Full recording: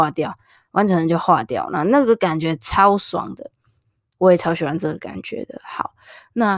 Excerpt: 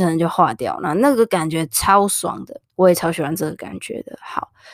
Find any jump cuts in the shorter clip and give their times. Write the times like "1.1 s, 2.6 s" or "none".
2.7 s